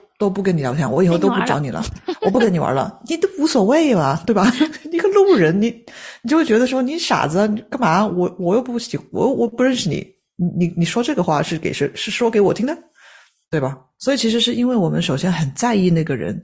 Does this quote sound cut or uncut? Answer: uncut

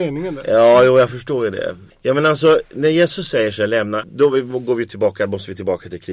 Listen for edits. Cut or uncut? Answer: cut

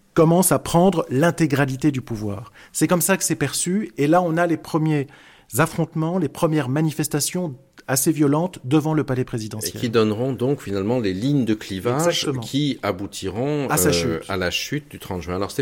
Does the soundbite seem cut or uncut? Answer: uncut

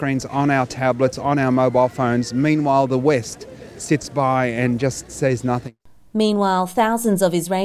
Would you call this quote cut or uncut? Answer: uncut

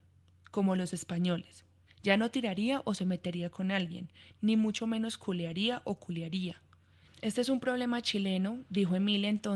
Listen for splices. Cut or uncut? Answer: cut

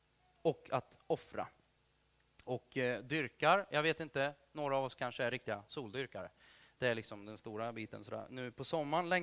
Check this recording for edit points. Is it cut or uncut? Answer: uncut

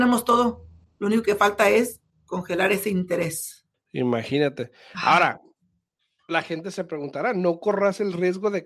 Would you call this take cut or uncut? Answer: uncut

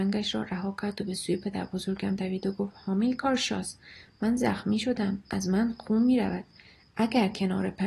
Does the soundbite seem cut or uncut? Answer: uncut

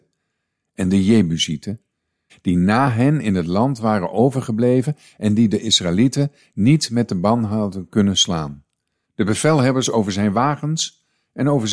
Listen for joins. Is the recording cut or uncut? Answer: cut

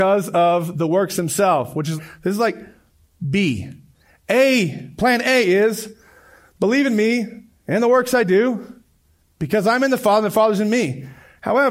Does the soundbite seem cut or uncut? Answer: cut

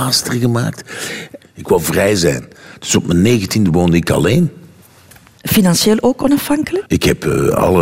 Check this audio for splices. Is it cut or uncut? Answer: cut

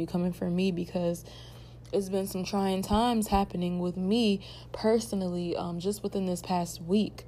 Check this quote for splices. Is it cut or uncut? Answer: uncut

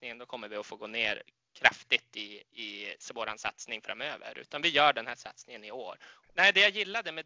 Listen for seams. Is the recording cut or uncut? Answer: cut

